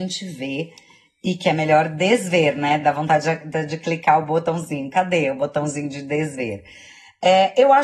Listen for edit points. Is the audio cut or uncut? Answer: uncut